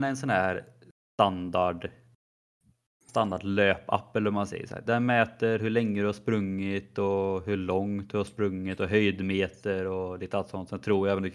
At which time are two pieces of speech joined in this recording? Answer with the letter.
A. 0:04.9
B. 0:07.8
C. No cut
A